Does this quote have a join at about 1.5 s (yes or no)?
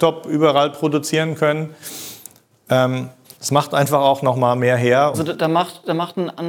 no